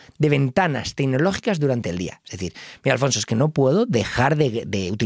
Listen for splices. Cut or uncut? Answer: uncut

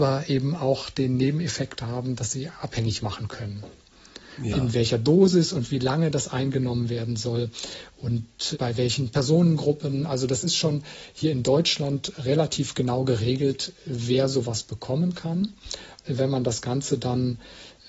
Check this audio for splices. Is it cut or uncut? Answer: cut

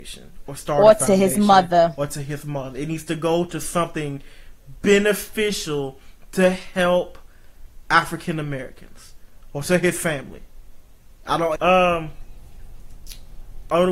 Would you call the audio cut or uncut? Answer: cut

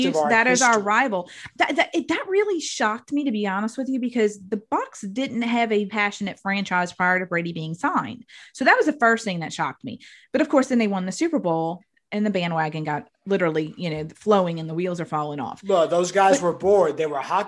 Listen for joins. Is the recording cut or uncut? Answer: cut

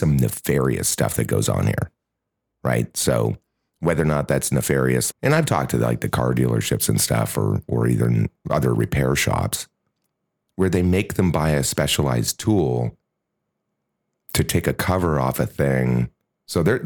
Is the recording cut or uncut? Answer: cut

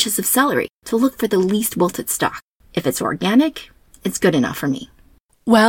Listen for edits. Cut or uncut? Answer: uncut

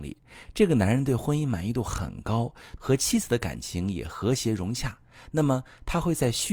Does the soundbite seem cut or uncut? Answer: cut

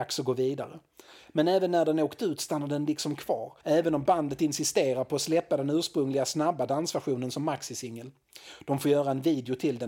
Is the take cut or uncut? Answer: cut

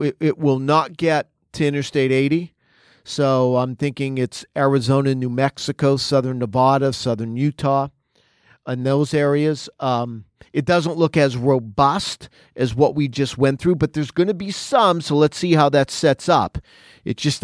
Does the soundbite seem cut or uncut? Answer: uncut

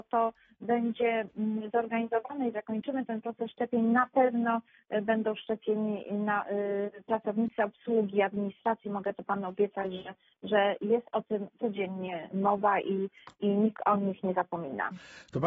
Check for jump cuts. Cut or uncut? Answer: uncut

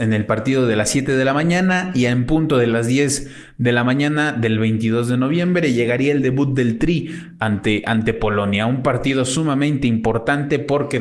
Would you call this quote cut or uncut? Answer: uncut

